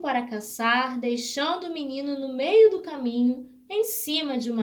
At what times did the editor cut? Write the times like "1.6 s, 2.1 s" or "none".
none